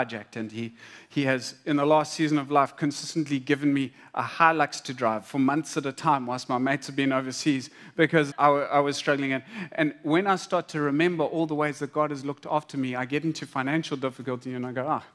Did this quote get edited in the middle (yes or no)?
yes